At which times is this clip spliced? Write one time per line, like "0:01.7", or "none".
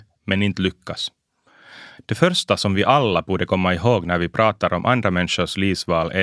none